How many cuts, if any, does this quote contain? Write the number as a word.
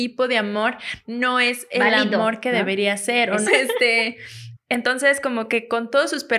two